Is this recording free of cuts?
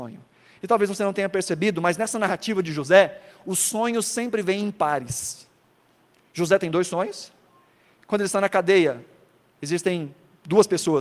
yes; 0 cuts

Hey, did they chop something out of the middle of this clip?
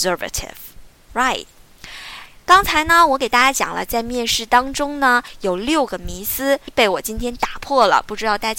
yes; 1 cut; at 6.7 s

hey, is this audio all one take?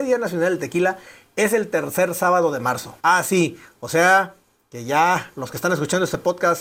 no; 1 cut; at 3.0 s

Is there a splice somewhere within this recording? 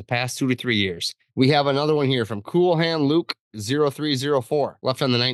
yes; 1 cut; at 1.3 s

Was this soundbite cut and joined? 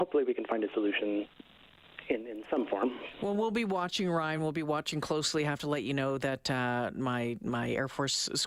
no; 0 cuts

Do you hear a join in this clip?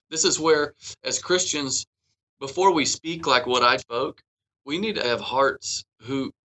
yes; 2 cuts; at 3.8 s, 5.0 s

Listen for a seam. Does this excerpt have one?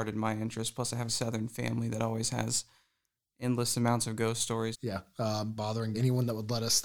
yes; 3 cuts; at 1.1 s, 4.7 s, 5.9 s

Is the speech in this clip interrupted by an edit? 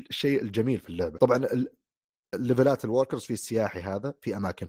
yes; 1 cut; at 1.1 s

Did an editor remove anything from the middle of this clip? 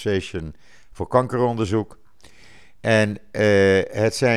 no; 0 cuts

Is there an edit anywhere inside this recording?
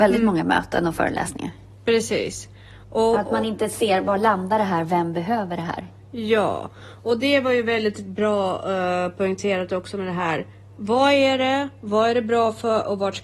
no; 0 cuts

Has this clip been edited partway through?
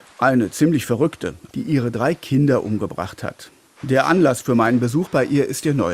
yes; 2 cuts; at 1.5 s, 3.8 s

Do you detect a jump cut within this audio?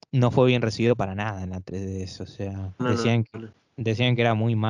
yes; 1 cut; at 2.8 s

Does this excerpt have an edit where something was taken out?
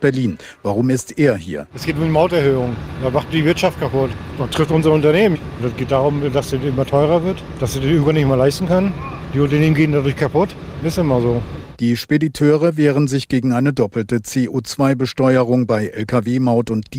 no; 0 cuts

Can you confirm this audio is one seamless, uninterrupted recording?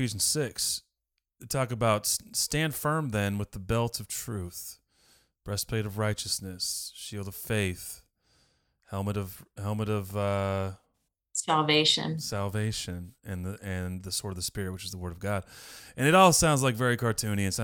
yes; 0 cuts

